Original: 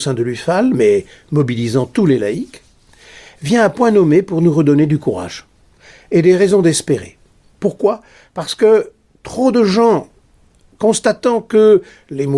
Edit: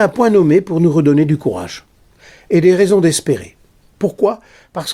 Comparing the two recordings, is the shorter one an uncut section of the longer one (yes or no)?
yes